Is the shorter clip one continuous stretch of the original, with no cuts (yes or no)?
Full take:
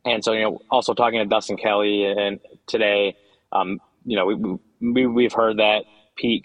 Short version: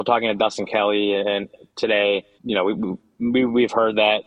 no